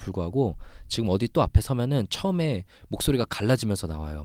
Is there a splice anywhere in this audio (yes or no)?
no